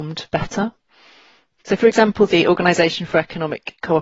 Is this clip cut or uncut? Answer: cut